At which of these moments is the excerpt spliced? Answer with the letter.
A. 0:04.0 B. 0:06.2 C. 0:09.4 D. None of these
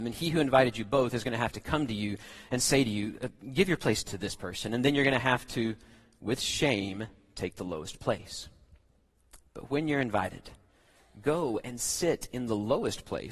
A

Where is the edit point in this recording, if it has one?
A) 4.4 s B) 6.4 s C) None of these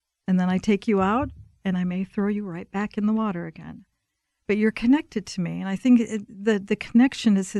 C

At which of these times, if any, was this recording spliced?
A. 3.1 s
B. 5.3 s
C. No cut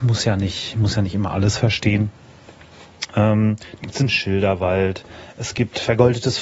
A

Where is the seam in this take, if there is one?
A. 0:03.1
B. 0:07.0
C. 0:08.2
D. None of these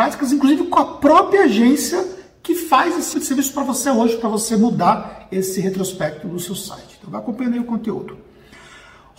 A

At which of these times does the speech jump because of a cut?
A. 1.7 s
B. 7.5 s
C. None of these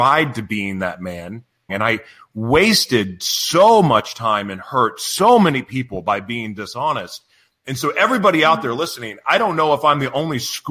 A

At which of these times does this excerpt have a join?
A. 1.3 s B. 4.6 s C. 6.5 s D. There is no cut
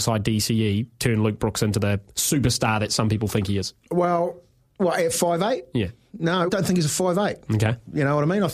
C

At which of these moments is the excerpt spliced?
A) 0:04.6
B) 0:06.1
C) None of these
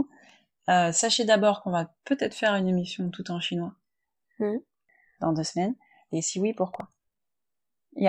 B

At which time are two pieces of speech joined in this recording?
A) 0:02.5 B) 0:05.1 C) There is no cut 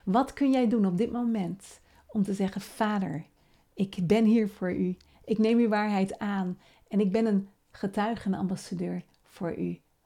B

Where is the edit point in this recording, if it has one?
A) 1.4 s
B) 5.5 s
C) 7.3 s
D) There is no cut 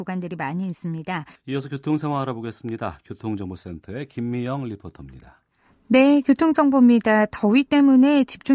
A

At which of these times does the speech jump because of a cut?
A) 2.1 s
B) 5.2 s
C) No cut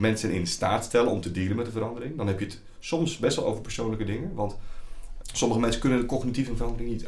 B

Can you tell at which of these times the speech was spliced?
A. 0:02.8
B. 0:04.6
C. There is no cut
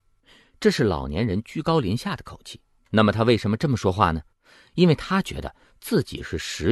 A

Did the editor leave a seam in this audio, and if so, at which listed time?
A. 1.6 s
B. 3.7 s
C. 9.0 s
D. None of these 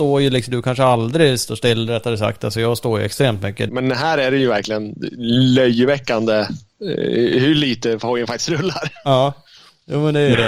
B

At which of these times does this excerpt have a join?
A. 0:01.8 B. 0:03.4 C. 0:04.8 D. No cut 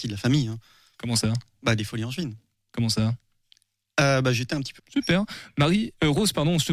C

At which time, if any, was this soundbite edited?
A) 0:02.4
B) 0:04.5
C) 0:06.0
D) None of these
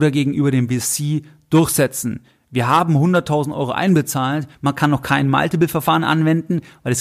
B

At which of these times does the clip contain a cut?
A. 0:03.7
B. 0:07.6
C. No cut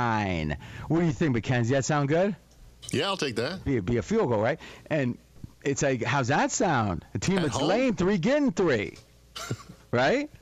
A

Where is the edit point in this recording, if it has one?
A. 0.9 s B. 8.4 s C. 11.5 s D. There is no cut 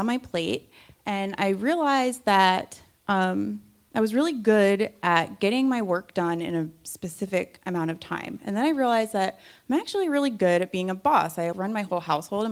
C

